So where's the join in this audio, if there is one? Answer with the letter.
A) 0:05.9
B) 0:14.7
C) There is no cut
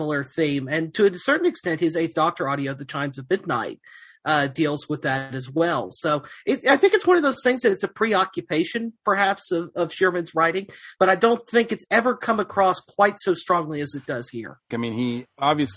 B